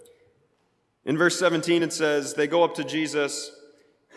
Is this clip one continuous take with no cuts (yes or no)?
yes